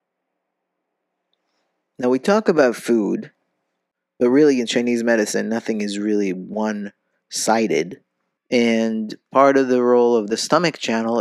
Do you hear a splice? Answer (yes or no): yes